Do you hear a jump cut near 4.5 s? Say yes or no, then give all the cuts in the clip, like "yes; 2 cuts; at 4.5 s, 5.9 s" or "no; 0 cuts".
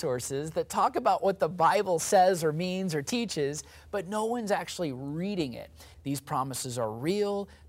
no; 1 cut; at 5.9 s